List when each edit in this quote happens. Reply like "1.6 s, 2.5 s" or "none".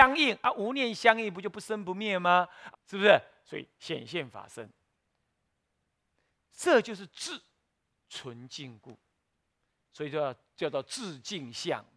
2.7 s